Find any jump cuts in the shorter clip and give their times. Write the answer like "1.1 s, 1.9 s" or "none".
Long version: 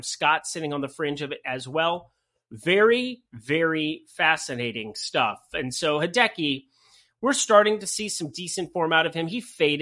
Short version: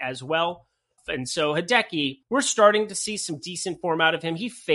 1.0 s, 2.2 s